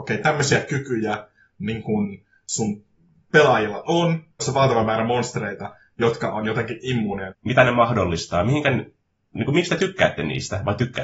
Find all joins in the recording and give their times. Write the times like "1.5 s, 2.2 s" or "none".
4.4 s, 7.3 s